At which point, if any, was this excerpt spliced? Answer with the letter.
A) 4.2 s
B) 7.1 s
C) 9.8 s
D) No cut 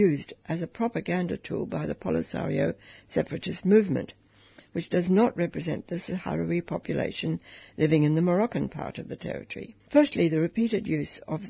C